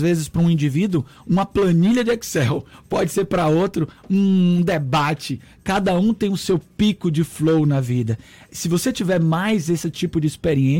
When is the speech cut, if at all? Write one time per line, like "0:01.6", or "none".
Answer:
none